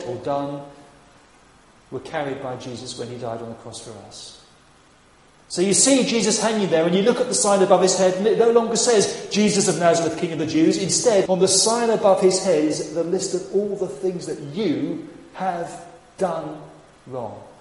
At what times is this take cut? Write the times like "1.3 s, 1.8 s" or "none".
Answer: 11.3 s